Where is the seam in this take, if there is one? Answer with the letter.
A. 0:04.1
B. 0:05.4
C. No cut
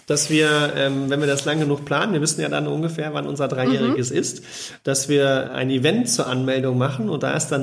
B